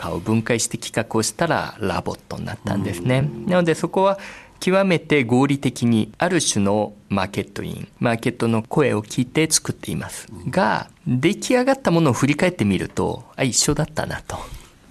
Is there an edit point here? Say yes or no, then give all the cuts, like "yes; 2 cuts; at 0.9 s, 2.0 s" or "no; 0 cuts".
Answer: no; 0 cuts